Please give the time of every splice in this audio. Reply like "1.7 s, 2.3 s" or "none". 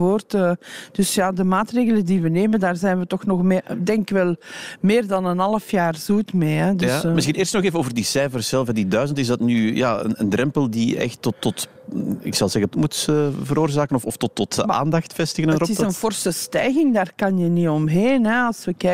12.7 s